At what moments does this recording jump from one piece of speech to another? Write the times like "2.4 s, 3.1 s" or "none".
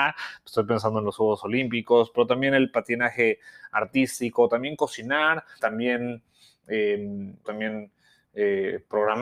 5.6 s, 7.4 s